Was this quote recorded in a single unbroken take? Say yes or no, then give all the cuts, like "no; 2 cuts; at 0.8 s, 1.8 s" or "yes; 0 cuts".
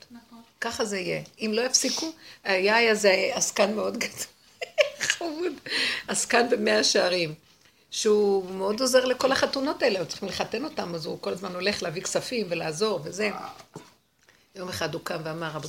yes; 0 cuts